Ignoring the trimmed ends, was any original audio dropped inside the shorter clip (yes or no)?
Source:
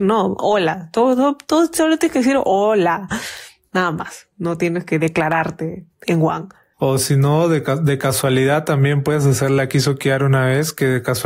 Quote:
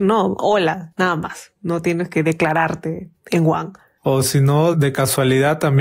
yes